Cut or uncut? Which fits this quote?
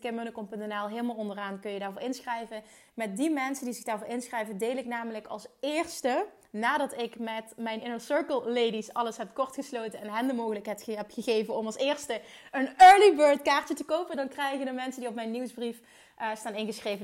uncut